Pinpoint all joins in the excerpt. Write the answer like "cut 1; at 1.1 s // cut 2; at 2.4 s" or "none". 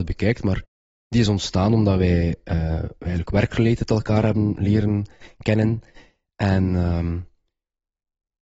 none